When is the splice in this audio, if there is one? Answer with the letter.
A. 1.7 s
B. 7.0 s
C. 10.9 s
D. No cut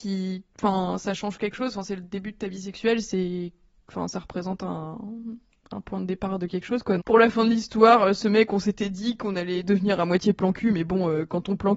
B